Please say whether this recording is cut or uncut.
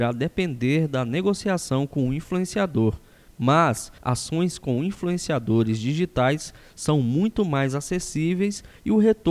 cut